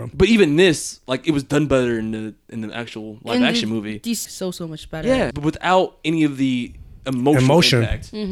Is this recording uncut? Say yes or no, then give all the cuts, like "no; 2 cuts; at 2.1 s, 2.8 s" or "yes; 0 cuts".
no; 2 cuts; at 4.2 s, 5.3 s